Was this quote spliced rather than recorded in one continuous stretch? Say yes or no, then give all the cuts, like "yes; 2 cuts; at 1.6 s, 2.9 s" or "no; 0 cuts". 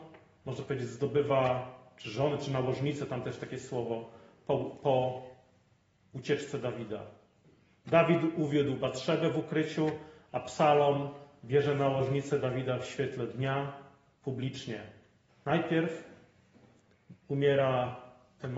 yes; 2 cuts; at 15.3 s, 17.2 s